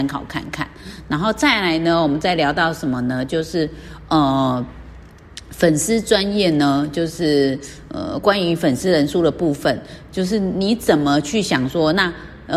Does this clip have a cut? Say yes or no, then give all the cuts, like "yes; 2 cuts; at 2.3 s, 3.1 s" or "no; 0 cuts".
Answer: no; 0 cuts